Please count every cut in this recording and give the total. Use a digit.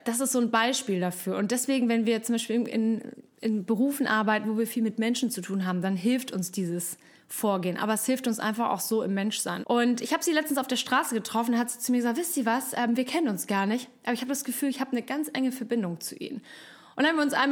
1